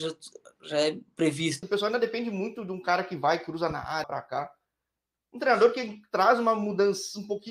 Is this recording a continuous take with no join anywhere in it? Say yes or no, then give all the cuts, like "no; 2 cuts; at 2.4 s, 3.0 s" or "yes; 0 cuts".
no; 2 cuts; at 1.6 s, 4.0 s